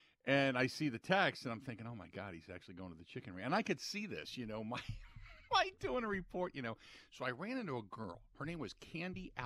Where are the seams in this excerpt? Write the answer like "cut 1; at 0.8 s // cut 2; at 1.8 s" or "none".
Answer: none